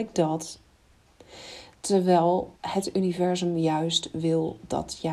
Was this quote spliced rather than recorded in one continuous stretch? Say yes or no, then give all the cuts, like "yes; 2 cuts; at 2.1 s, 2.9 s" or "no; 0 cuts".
yes; 1 cut; at 2.6 s